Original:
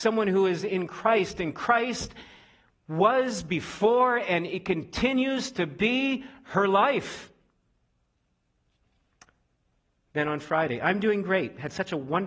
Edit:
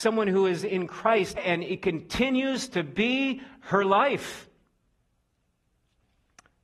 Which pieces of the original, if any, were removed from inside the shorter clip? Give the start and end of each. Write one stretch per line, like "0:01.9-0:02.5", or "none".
0:01.4-0:04.2